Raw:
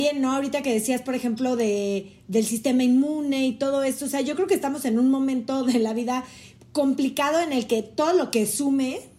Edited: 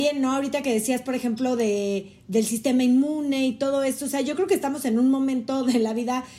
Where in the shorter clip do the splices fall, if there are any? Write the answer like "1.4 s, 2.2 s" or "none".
none